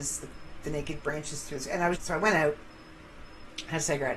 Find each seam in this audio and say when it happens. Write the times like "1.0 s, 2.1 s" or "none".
1.9 s